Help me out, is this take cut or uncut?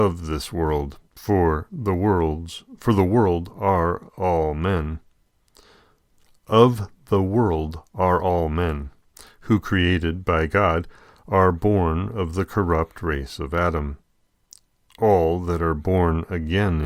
cut